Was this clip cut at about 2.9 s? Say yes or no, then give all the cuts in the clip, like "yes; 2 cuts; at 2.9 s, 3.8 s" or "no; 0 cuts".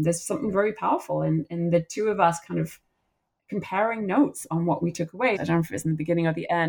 no; 1 cut; at 5.4 s